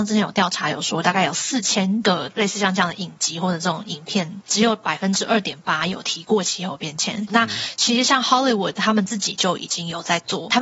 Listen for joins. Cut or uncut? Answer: cut